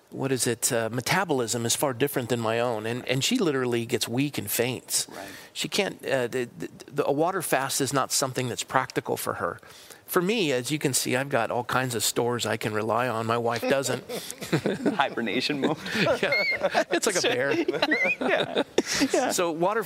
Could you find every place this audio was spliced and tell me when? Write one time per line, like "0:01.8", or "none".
none